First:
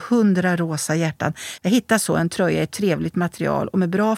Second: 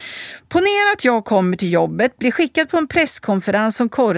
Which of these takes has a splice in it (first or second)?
first